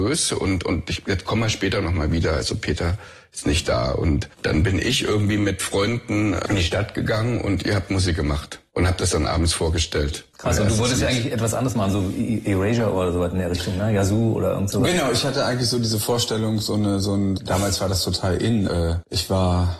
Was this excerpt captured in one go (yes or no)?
no